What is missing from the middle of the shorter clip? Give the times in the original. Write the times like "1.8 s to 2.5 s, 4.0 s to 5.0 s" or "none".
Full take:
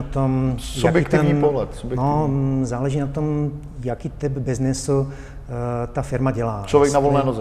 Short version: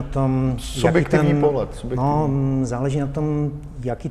none